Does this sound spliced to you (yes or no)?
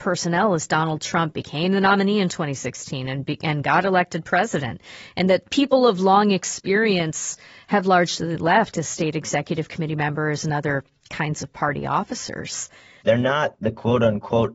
yes